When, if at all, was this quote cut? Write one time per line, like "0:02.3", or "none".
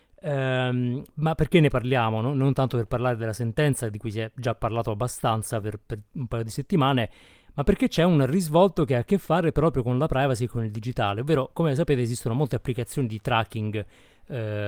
none